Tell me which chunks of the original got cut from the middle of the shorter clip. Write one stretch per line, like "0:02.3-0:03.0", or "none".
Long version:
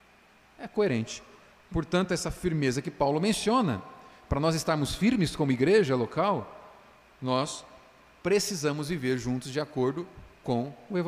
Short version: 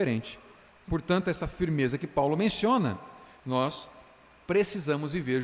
0:04.2-0:07.1